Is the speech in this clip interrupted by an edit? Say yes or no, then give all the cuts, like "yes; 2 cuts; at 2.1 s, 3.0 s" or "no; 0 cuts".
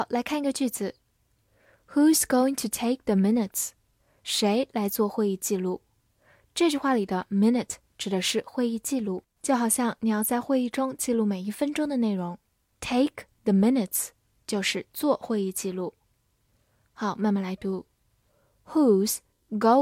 no; 0 cuts